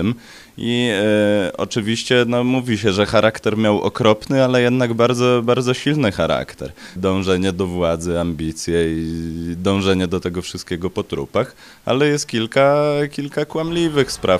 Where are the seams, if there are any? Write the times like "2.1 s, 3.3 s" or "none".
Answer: 7.0 s